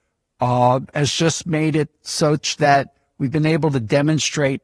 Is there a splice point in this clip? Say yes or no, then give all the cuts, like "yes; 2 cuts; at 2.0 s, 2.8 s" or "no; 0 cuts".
no; 0 cuts